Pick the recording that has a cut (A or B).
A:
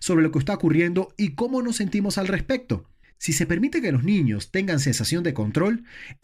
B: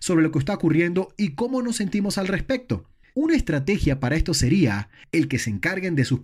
B